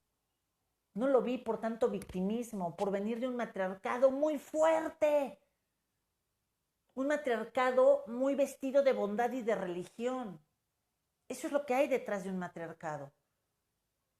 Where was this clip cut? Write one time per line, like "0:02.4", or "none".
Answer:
none